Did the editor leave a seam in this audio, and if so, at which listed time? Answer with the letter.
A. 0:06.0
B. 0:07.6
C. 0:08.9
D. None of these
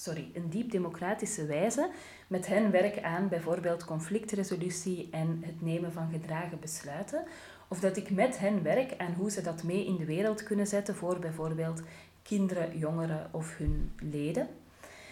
D